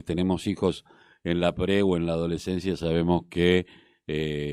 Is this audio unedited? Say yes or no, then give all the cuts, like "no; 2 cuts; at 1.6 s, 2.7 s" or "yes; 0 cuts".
yes; 0 cuts